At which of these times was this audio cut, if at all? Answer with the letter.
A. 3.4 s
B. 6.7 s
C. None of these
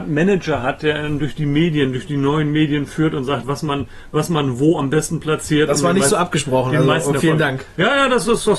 C